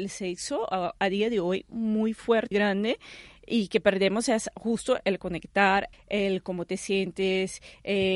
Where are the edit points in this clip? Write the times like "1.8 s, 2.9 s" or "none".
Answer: 2.5 s, 5.9 s

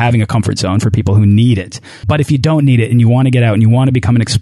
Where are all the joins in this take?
2.0 s

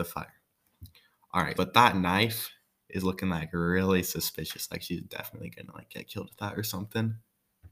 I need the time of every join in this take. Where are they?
1.5 s

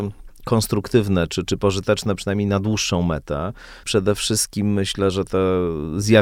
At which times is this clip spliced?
3.8 s

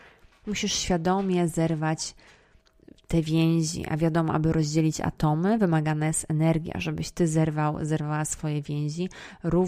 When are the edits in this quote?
none

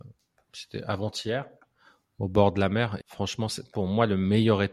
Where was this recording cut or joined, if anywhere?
3.0 s

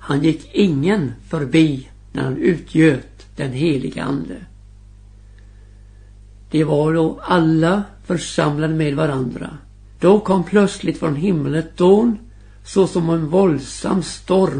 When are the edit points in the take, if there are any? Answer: 10.0 s

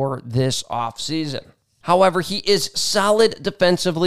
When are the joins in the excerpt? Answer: 1.8 s

